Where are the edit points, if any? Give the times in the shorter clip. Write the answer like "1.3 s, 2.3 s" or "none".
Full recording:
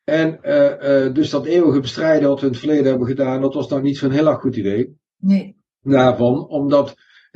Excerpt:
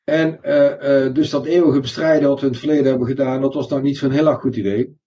none